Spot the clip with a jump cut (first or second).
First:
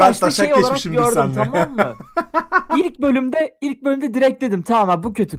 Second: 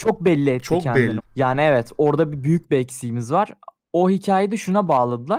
second